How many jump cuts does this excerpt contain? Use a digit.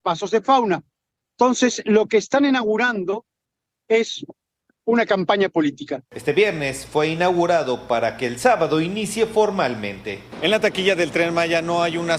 1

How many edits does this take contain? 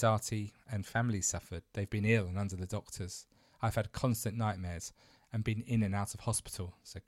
0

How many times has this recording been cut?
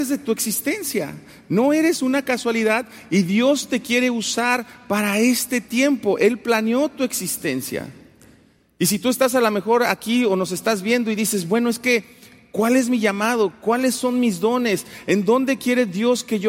0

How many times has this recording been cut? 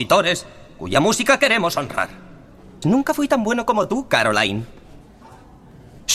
1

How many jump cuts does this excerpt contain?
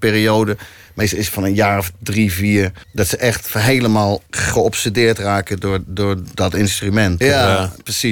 3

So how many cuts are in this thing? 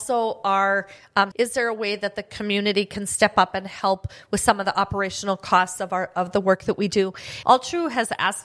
2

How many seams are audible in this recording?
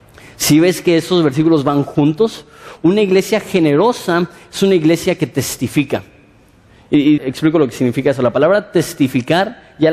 1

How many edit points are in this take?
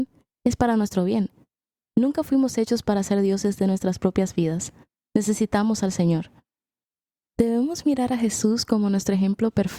0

